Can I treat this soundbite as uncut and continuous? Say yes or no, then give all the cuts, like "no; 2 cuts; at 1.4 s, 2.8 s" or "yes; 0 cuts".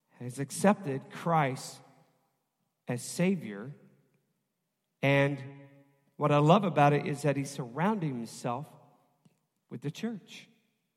yes; 0 cuts